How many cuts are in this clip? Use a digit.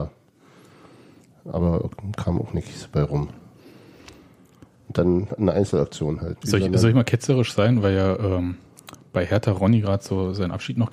1